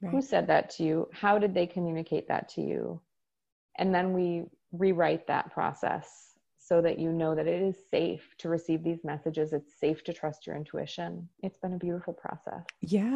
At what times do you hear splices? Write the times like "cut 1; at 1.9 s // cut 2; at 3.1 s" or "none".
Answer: cut 1; at 11.3 s